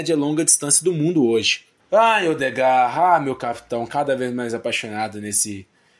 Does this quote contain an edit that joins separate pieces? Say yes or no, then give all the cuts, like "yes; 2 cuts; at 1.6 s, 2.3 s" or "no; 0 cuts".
yes; 1 cut; at 1.8 s